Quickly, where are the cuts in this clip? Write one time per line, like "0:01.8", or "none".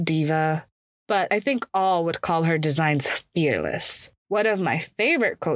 0:01.0
0:04.2